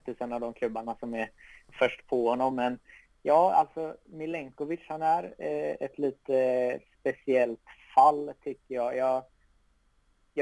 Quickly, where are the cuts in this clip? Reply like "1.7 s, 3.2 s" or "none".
none

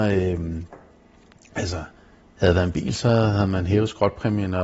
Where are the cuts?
none

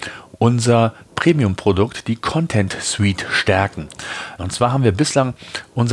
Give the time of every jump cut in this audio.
4.4 s

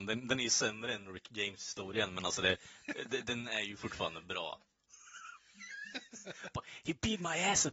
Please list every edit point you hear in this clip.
none

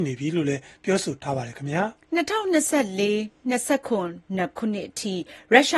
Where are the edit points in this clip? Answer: 2.0 s

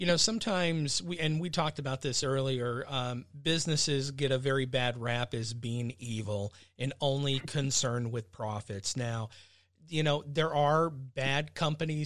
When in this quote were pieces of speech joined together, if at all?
none

